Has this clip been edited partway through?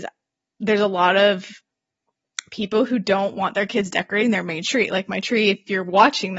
no; 0 cuts

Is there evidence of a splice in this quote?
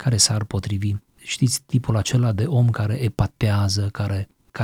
no; 0 cuts

